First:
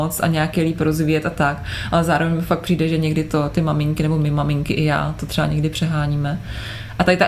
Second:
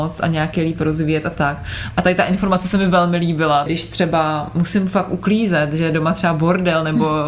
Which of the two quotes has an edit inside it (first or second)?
second